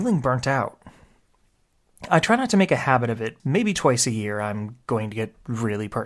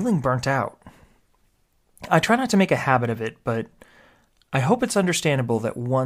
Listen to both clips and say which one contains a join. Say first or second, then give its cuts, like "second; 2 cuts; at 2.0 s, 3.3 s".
first; 1 cut; at 3.4 s